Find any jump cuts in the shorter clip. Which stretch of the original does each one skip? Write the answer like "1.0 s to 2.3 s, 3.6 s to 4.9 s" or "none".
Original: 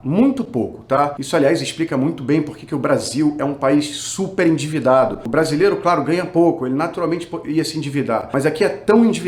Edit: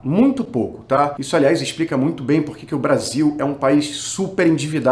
none